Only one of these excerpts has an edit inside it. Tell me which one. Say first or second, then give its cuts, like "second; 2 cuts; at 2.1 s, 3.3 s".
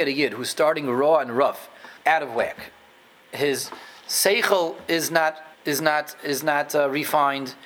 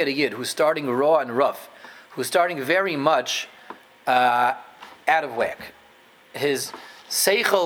first; 2 cuts; at 2.0 s, 5.5 s